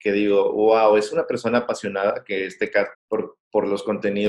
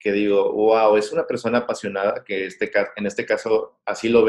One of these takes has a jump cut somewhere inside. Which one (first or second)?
first